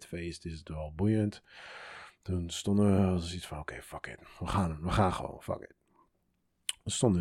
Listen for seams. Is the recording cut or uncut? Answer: uncut